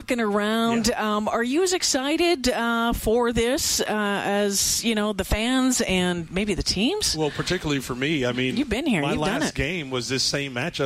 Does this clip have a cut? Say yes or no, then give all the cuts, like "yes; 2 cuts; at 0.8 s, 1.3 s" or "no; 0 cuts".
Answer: no; 0 cuts